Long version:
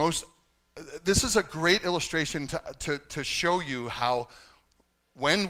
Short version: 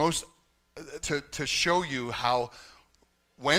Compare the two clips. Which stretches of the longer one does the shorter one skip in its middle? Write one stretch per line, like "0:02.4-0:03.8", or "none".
0:01.0-0:02.8